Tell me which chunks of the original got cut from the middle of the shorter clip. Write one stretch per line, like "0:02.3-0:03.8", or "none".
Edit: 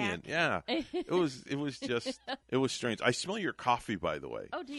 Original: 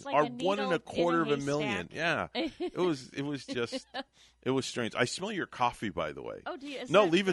0:04.1-0:04.4